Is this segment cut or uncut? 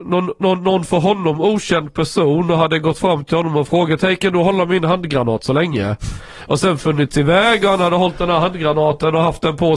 uncut